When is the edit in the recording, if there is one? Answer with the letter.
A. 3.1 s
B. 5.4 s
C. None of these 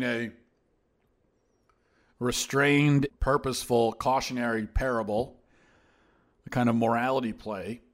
A